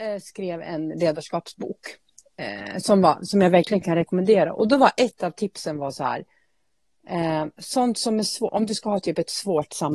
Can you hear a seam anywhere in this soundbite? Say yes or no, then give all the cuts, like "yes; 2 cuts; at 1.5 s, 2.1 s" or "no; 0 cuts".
no; 0 cuts